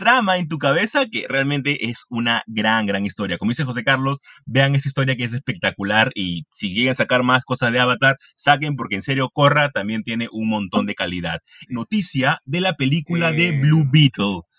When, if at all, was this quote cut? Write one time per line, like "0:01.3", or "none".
0:11.7

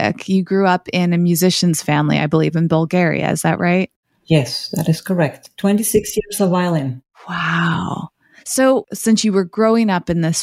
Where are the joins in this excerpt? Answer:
none

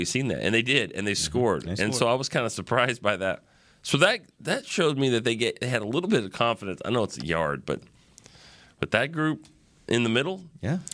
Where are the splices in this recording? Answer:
none

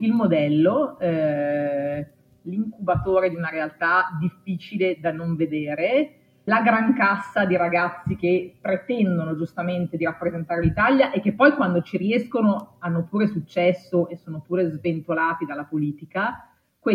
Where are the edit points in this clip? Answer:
0:06.5

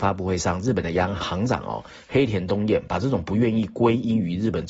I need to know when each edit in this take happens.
0:01.2

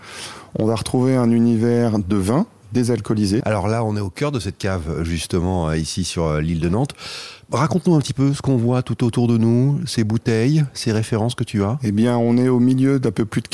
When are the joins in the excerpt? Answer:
0:03.4

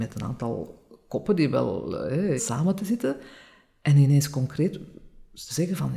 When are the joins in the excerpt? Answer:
0:02.4

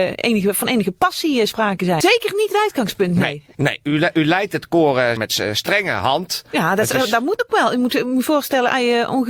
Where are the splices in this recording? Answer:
0:02.0
0:05.2

